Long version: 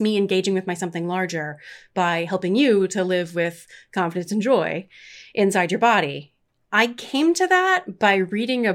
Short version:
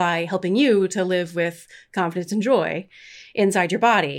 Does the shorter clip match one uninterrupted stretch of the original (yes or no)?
yes